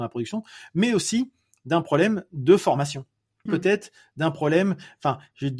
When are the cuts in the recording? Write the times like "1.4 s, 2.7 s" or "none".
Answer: 3.5 s